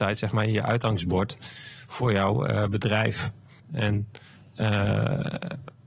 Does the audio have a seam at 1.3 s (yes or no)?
no